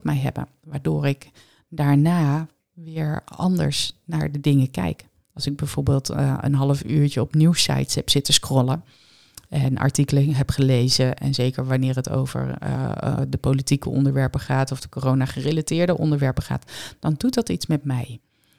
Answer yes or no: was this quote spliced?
no